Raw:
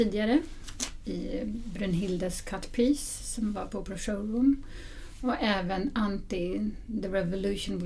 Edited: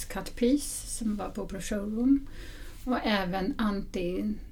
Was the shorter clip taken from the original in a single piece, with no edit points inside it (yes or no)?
yes